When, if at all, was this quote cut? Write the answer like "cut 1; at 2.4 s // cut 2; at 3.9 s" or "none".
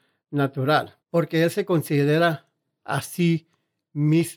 cut 1; at 1.0 s